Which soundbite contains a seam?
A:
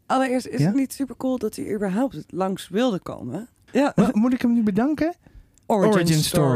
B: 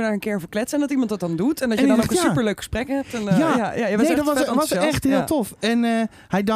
A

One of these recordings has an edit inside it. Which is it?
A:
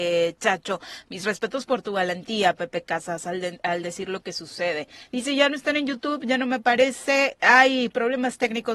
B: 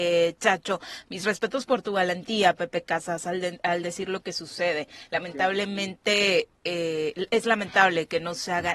A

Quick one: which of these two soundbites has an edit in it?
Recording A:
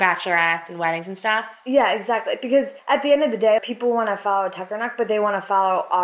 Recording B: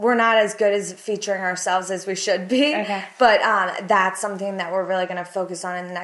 A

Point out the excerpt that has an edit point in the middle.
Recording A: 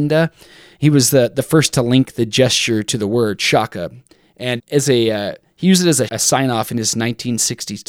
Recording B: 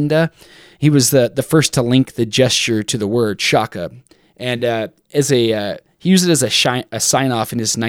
A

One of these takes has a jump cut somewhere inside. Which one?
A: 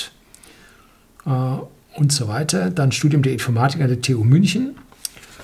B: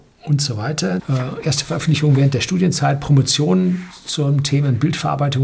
B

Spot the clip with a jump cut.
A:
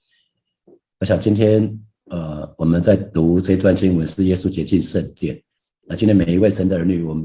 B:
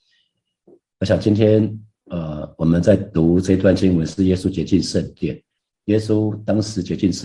B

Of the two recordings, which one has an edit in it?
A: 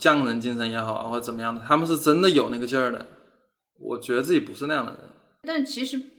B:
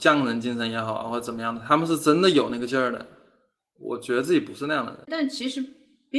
B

